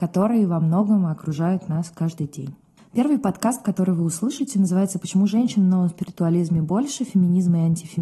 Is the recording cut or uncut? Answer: uncut